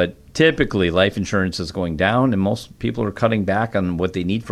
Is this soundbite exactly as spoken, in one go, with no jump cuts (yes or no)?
yes